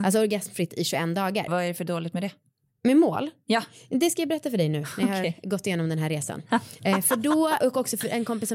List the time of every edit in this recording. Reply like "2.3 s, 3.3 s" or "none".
1.5 s, 7.6 s